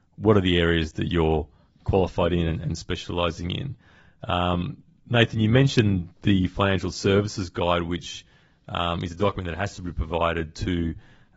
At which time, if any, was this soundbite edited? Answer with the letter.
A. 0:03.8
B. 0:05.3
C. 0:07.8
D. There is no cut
D